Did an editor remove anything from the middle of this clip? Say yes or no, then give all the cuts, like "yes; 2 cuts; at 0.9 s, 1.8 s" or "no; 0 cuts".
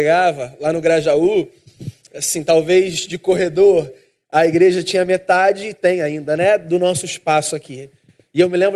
no; 0 cuts